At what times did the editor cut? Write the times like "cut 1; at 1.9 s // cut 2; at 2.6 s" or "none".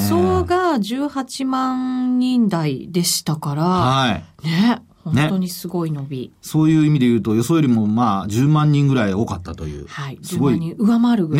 none